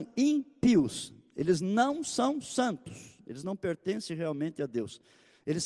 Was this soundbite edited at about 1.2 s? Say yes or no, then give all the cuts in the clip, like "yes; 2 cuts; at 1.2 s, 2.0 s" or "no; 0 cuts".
no; 0 cuts